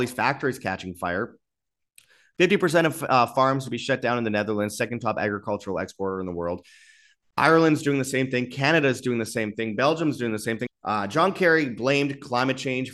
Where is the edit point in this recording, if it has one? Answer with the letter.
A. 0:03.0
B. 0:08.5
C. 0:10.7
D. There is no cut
C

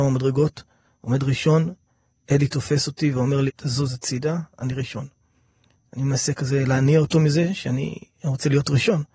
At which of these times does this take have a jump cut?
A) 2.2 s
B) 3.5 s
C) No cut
B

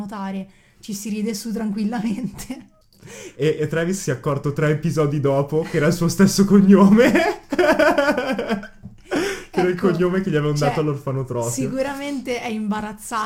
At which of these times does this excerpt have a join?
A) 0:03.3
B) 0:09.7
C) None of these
A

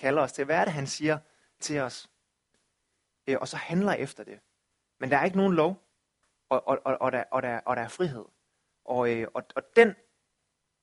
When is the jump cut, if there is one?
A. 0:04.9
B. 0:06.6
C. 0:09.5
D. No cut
D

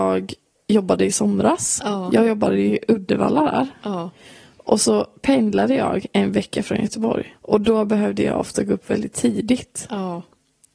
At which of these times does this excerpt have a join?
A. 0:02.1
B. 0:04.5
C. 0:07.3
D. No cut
C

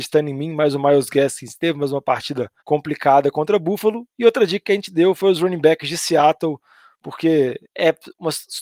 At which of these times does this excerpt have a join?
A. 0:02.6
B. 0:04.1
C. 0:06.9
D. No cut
A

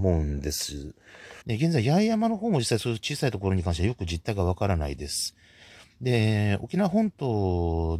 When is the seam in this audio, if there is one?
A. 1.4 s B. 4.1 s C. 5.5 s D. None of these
A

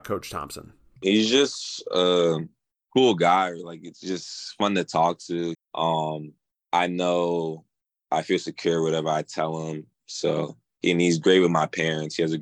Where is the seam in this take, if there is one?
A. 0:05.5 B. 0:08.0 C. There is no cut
A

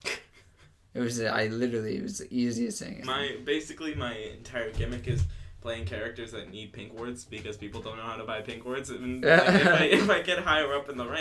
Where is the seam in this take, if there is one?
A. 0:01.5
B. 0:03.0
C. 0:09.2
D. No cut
B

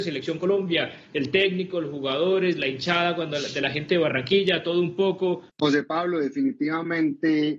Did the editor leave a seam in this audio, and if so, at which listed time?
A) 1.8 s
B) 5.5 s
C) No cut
B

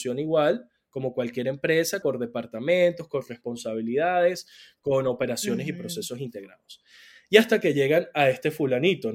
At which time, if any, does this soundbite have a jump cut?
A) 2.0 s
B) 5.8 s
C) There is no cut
A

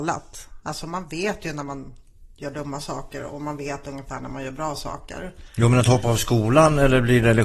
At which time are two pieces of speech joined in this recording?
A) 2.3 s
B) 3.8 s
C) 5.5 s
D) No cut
D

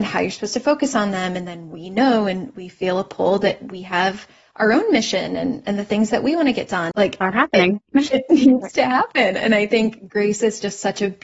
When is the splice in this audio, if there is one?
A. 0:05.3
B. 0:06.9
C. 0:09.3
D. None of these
B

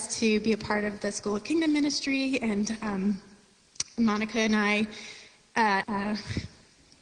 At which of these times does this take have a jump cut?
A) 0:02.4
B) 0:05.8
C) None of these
B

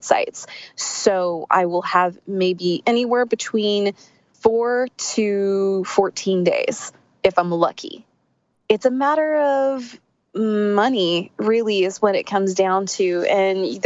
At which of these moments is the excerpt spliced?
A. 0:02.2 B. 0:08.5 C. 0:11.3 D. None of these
B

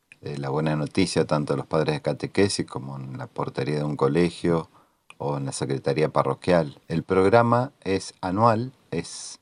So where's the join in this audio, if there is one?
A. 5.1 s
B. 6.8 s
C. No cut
B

